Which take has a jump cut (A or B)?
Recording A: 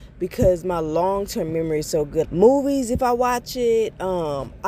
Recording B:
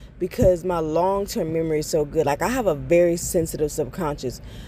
A